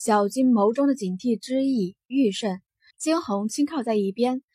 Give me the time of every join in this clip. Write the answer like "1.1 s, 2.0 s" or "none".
2.9 s